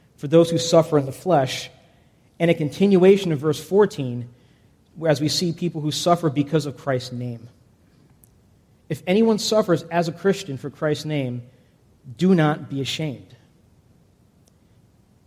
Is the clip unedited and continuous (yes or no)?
yes